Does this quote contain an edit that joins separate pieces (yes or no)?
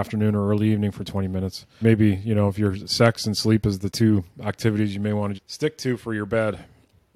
yes